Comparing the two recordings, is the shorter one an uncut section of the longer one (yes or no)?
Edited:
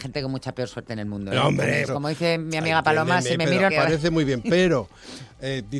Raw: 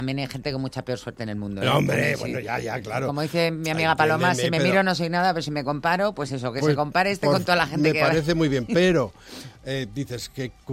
no